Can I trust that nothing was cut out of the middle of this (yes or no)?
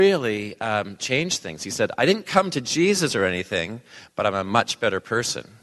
yes